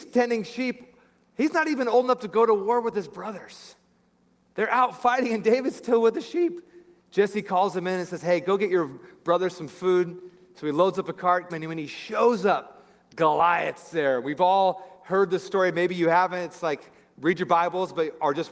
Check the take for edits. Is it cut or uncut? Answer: cut